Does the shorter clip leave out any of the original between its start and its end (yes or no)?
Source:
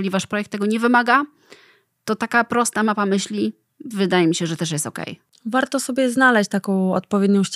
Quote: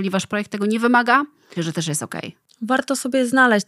yes